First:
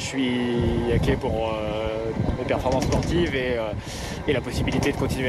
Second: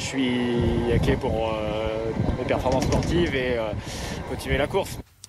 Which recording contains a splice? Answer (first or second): second